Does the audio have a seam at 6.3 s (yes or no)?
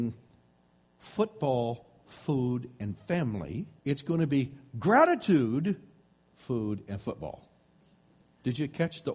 yes